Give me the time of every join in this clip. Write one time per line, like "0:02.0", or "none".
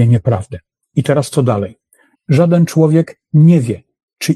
0:02.1